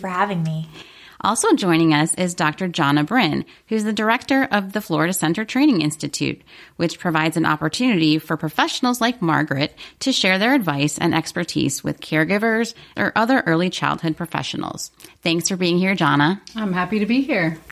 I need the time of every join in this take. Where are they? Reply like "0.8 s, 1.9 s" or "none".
13.0 s

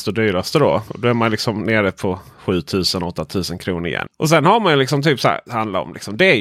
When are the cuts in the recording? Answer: 4.1 s, 5.5 s

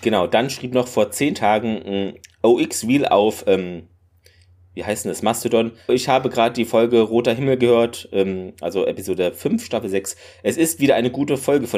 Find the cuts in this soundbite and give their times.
5.9 s

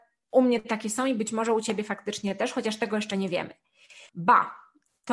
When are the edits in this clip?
4.1 s

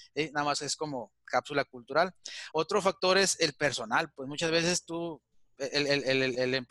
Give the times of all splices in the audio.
none

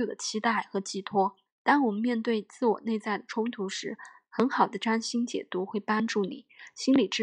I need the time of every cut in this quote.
1.5 s

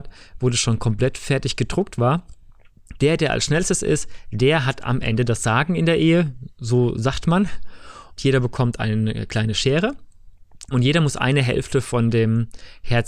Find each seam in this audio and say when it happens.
3.0 s, 8.2 s, 10.7 s

